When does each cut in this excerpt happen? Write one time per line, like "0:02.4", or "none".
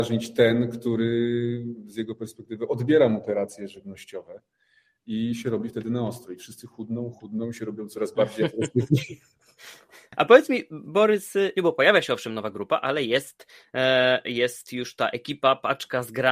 0:07.1
0:11.6